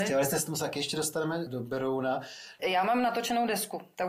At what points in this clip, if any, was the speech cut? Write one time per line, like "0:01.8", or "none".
0:01.5
0:02.6